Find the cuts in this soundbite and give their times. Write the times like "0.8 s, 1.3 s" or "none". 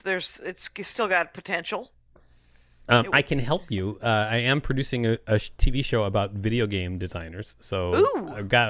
none